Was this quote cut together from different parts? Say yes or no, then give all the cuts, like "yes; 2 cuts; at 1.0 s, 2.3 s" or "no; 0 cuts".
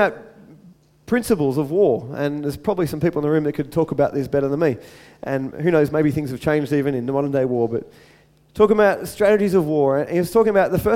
no; 0 cuts